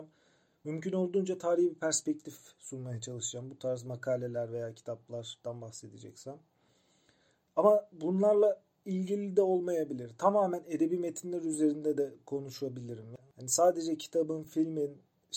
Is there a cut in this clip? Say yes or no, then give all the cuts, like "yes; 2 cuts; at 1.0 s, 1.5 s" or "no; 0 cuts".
no; 0 cuts